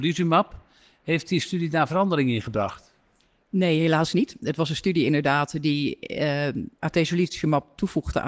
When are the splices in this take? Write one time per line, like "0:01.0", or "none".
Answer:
0:06.7

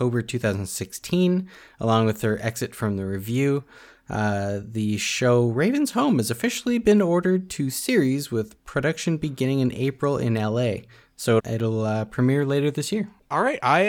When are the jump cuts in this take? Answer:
0:11.4

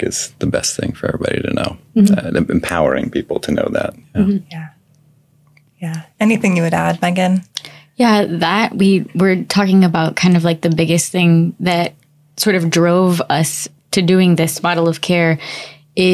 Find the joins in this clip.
none

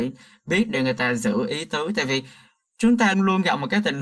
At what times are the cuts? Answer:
0:03.1

